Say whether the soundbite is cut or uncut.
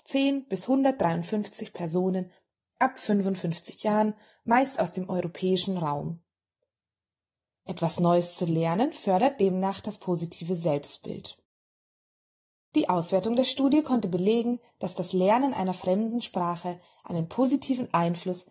cut